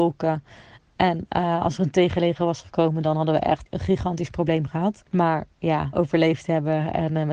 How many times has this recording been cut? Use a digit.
2